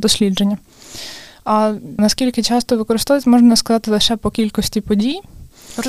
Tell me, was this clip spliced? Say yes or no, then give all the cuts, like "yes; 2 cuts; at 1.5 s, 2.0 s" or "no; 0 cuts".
yes; 1 cut; at 2.0 s